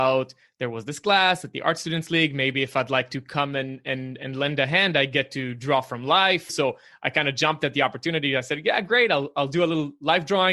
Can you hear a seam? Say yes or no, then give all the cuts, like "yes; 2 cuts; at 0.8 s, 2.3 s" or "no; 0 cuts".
yes; 1 cut; at 6.5 s